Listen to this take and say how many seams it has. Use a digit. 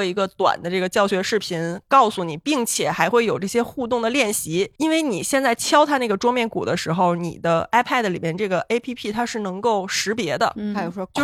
1